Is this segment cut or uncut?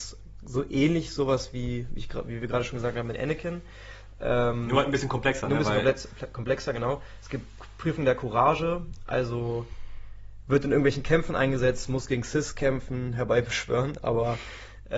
cut